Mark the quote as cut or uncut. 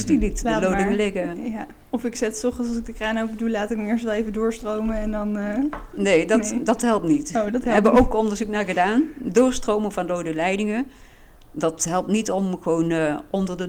uncut